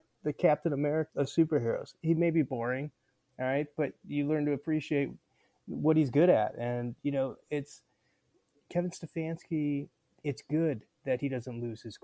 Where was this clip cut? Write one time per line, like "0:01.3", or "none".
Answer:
0:01.1